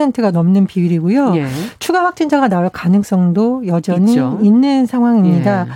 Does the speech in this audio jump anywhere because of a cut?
no; 0 cuts

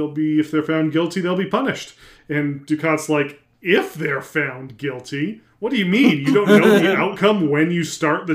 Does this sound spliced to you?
no; 0 cuts

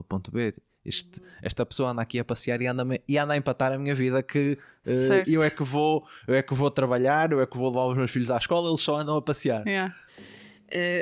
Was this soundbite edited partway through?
yes; 1 cut; at 10.1 s

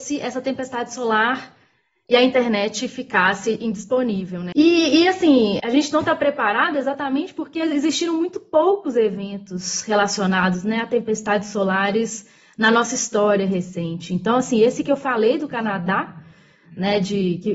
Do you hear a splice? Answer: yes; 2 cuts; at 4.5 s, 5.6 s

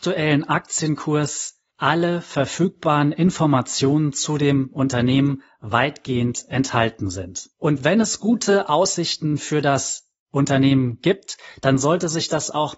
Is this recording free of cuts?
yes; 0 cuts

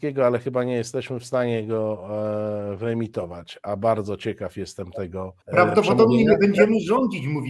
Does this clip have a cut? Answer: yes; 1 cut; at 5.4 s

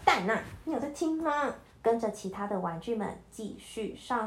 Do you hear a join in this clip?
yes; 1 cut; at 1.7 s

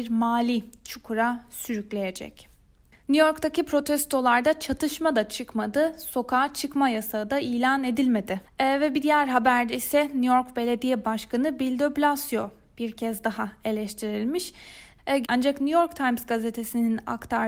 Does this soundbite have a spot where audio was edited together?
yes; 2 cuts; at 8.4 s, 15.2 s

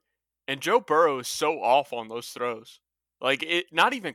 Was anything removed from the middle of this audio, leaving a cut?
no; 0 cuts

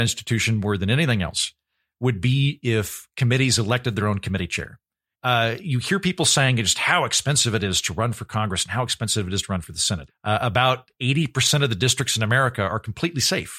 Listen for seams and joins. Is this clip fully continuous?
no; 2 cuts; at 5.1 s, 10.1 s

